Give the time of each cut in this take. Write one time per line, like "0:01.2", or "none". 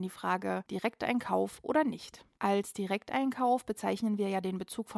0:02.3